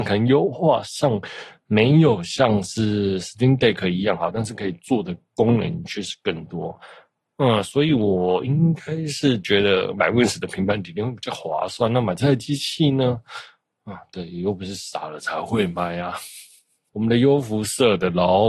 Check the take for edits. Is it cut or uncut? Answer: cut